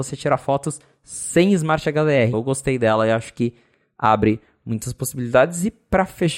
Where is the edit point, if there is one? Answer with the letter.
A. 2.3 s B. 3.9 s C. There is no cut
A